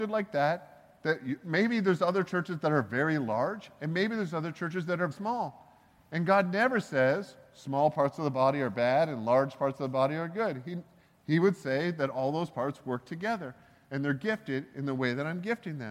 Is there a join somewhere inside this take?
yes; 1 cut; at 5.1 s

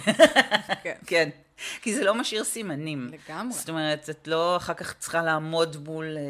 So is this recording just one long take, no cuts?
yes; 0 cuts

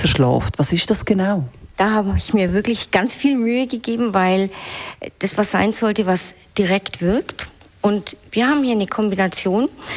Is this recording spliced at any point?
no; 0 cuts

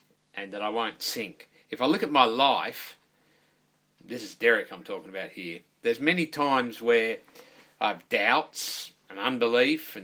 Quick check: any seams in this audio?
no; 0 cuts

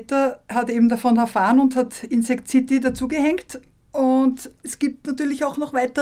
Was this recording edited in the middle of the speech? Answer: no; 0 cuts

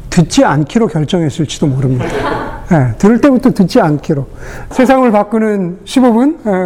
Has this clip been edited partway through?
yes; 1 cut; at 4.7 s

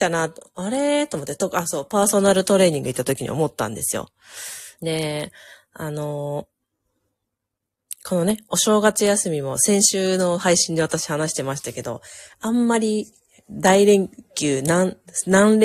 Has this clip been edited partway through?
yes; 1 cut; at 4.8 s

